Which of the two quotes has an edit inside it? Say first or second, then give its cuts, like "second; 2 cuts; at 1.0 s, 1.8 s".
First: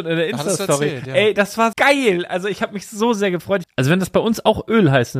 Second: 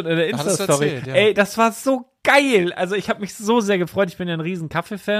first; 2 cuts; at 1.7 s, 3.6 s